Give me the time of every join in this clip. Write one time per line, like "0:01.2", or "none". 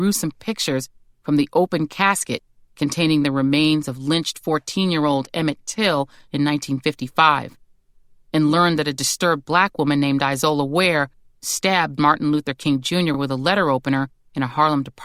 none